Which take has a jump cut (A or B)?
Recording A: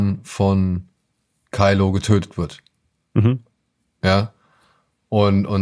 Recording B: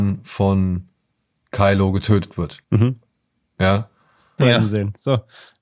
B